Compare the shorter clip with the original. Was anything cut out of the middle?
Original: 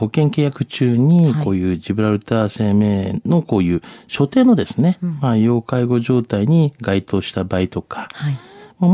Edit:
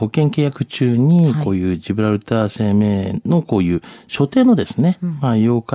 no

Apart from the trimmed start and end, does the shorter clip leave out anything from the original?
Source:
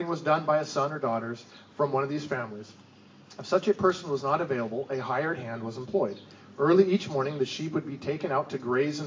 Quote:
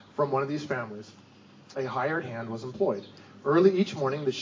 yes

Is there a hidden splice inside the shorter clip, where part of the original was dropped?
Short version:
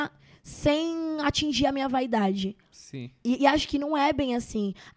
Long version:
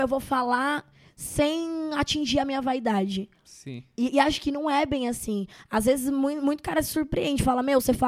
no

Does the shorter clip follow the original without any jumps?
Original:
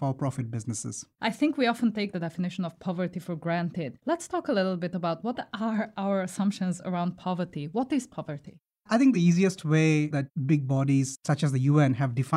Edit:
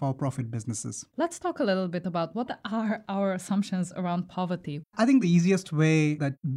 no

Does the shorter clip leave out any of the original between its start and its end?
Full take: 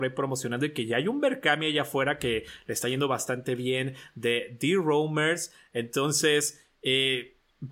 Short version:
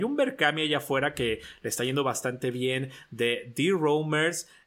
no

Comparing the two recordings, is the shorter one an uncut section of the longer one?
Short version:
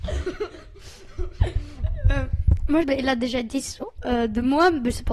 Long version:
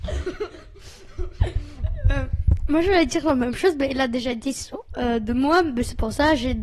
no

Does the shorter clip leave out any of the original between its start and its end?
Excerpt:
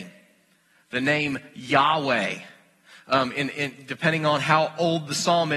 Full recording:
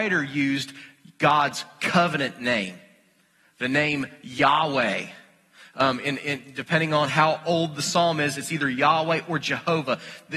no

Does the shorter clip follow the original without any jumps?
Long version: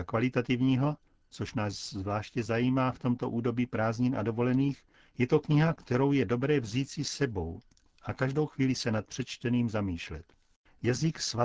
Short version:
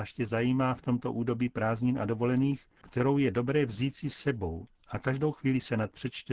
no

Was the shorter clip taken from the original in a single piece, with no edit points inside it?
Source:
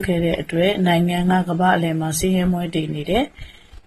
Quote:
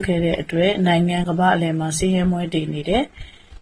no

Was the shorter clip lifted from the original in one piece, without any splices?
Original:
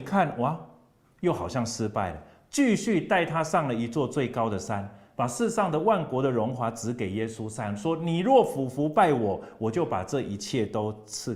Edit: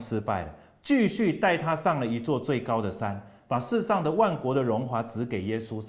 yes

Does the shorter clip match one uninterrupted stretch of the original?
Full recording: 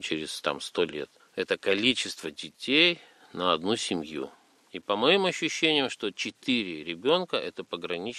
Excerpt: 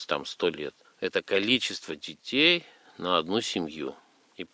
yes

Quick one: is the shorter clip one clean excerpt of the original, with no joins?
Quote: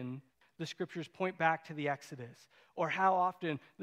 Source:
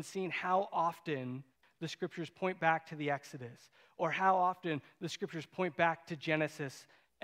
yes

